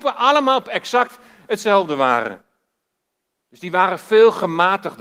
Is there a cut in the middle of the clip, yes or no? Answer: yes